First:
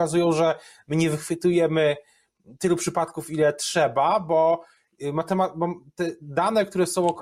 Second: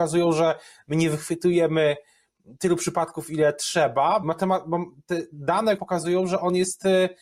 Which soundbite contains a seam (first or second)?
second